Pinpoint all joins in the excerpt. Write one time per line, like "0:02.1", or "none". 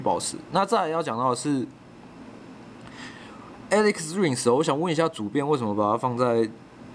none